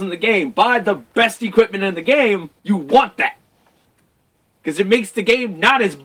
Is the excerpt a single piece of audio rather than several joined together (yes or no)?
no